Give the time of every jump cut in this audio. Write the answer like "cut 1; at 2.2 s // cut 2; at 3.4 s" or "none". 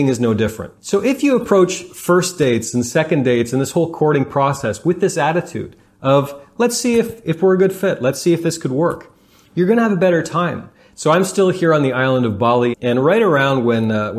cut 1; at 10.9 s // cut 2; at 12.7 s